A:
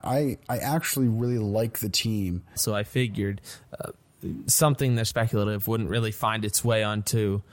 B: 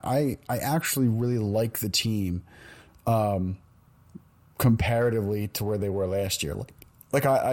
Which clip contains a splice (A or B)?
A